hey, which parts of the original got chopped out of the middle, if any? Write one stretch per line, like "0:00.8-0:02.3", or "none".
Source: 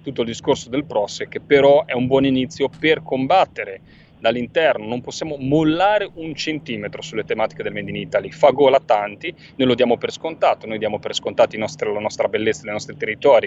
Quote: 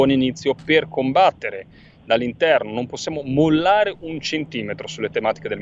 none